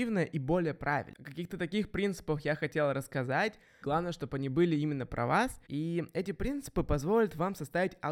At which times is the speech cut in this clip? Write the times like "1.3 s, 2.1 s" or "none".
3.8 s, 5.7 s